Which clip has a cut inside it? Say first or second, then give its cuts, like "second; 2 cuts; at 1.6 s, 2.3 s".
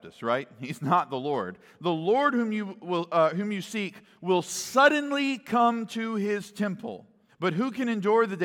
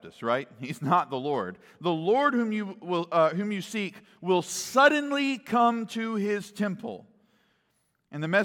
first; 1 cut; at 7.3 s